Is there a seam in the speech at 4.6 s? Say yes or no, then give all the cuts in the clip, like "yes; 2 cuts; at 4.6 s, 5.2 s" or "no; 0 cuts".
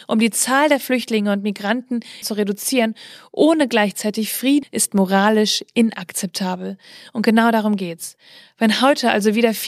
yes; 2 cuts; at 2.2 s, 4.6 s